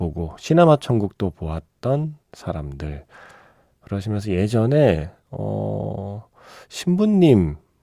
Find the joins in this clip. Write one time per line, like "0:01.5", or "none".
0:02.2